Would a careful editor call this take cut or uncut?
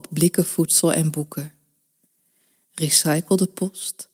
uncut